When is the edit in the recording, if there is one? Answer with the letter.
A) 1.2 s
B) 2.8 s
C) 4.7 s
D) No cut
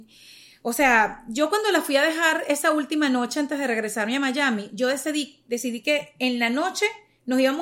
D